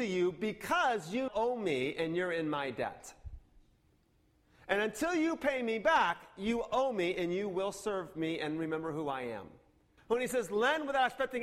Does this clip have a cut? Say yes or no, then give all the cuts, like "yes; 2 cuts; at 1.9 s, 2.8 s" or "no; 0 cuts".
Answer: yes; 2 cuts; at 1.3 s, 10.0 s